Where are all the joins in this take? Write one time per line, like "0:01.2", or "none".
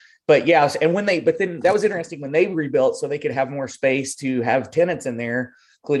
none